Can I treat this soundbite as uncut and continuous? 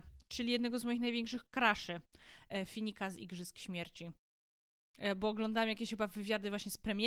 yes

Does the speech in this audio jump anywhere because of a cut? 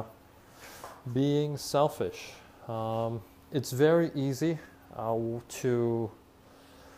yes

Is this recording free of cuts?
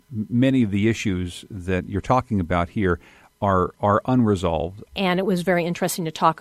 no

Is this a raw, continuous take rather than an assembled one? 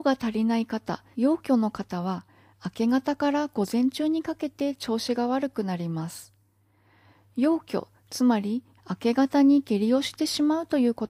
no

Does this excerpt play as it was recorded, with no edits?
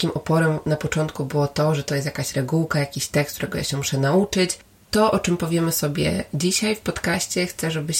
no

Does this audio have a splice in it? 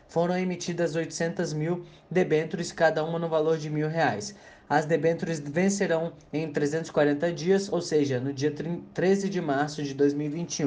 no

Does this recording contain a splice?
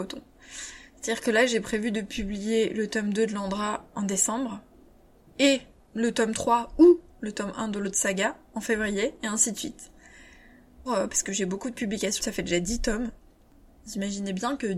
yes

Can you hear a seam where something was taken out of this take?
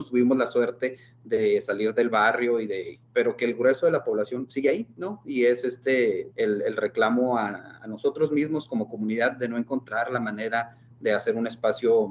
yes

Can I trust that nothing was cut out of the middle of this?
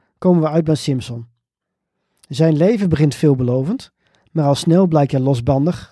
yes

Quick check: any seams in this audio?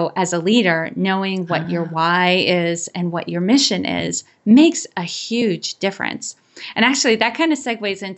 no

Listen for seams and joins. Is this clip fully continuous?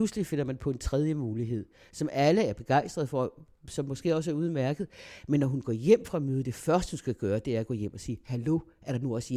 yes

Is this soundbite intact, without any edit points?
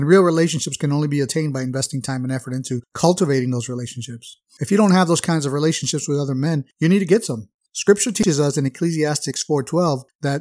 yes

